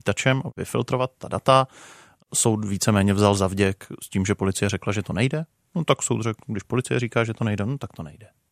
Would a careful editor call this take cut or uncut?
uncut